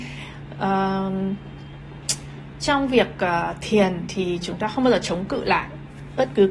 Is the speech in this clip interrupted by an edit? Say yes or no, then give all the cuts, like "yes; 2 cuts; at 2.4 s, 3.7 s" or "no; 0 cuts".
no; 0 cuts